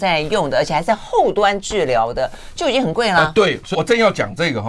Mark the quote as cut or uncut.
cut